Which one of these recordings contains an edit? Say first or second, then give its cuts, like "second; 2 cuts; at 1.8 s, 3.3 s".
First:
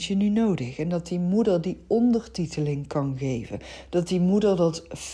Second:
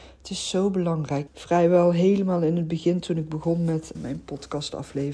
second; 2 cuts; at 1.3 s, 3.9 s